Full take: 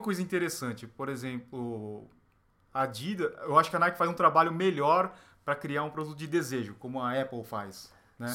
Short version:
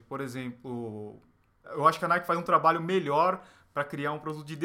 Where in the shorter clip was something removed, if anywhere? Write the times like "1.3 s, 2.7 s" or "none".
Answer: 1.6 s